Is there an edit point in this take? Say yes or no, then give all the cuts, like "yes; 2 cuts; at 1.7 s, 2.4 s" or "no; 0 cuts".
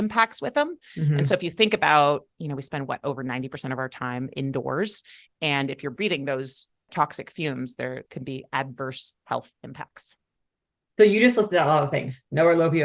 no; 0 cuts